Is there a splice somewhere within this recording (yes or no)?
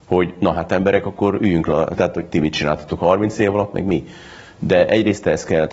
yes